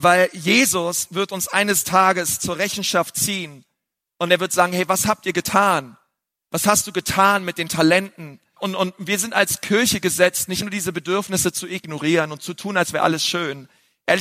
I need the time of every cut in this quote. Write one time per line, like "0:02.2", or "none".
0:08.6
0:10.6

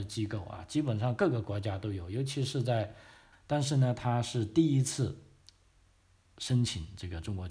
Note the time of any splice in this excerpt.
0:03.3

